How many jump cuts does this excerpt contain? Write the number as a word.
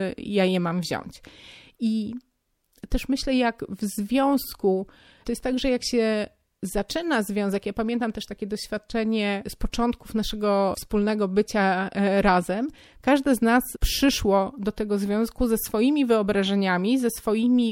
zero